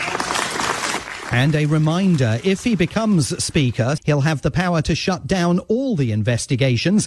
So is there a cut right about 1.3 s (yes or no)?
no